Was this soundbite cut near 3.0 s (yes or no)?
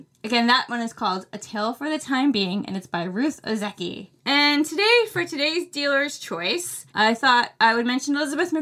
no